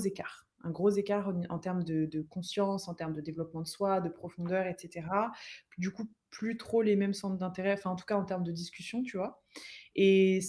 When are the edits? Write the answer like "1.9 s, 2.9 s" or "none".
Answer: none